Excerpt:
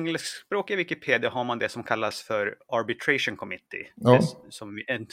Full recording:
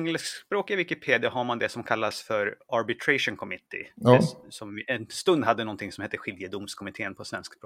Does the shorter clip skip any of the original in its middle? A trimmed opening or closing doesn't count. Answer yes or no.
no